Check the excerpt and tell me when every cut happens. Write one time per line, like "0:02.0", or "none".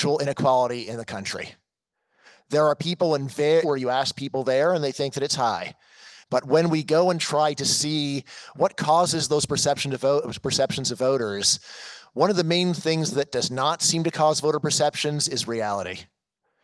0:03.6
0:06.2

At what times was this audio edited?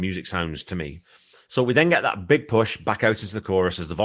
0:01.3

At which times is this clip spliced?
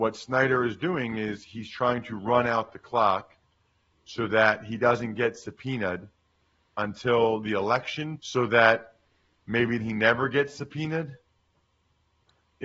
0:08.2
0:09.8

